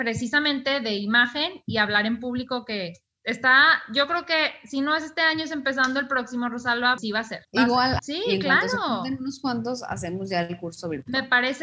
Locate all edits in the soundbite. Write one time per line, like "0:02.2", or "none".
0:07.0
0:08.0

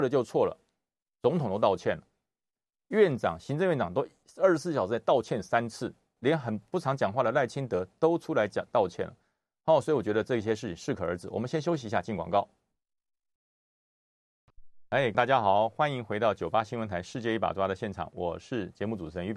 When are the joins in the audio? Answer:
0:06.2
0:15.1

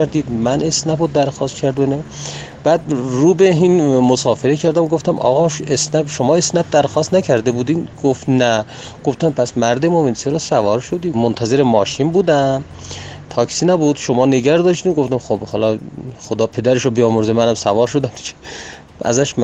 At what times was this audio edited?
0:11.1

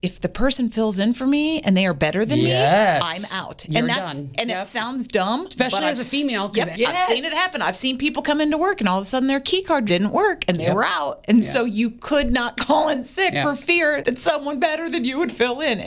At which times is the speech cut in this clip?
0:06.7
0:09.9

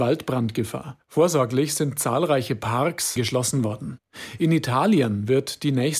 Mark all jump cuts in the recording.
0:03.2

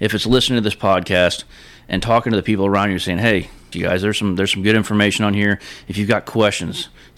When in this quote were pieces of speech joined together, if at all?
0:03.7

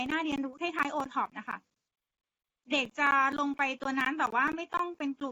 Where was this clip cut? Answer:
none

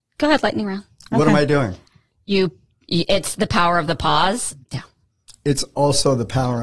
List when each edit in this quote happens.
0:04.6

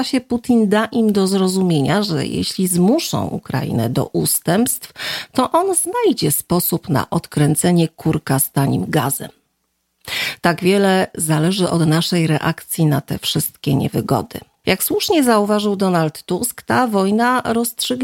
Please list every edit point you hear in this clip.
0:14.6

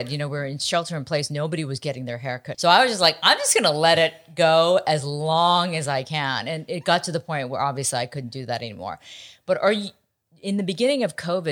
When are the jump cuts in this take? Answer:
0:02.5

